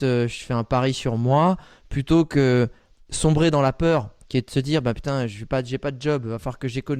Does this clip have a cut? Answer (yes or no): no